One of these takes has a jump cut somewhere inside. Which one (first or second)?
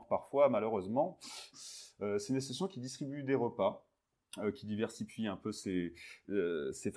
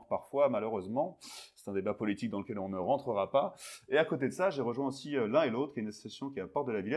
first